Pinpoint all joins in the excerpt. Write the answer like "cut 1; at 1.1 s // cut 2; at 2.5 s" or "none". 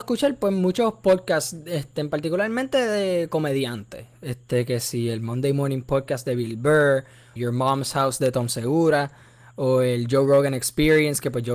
cut 1; at 7.4 s